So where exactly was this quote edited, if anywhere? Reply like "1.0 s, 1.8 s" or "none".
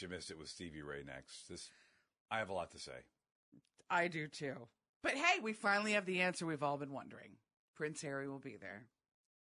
none